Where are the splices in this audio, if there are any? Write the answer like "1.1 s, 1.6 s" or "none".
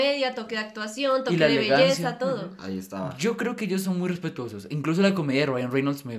none